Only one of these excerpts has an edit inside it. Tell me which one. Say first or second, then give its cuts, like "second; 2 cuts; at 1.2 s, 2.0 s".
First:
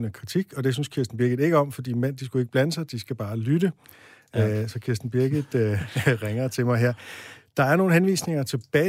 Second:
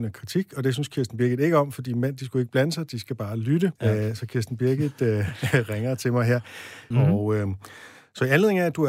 second; 2 cuts; at 3.8 s, 6.9 s